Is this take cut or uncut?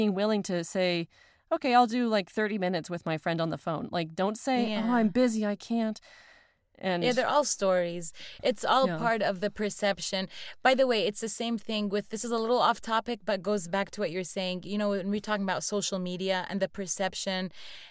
uncut